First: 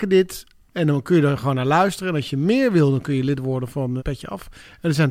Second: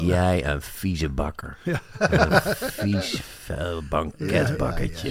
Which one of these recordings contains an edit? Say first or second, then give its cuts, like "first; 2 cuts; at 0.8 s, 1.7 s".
first; 1 cut; at 4.0 s